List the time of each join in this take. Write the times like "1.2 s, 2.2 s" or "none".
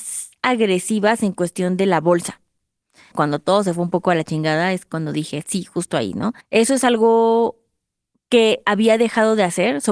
3.1 s, 6.4 s